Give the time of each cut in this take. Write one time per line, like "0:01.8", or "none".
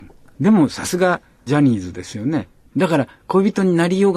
0:02.7